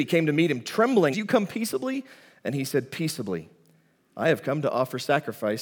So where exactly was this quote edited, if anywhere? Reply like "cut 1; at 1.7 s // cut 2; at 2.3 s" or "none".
cut 1; at 1.1 s